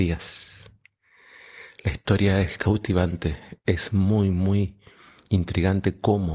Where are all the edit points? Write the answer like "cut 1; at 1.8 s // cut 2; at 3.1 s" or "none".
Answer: none